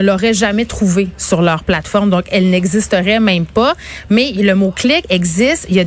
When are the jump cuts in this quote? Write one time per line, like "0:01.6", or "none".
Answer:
none